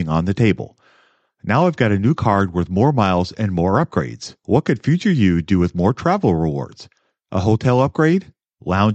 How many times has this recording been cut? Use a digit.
1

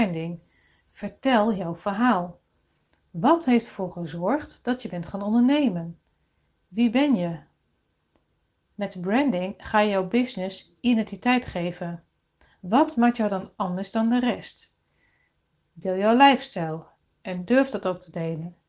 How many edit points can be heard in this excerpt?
0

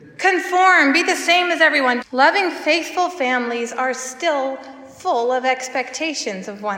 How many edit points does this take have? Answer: 1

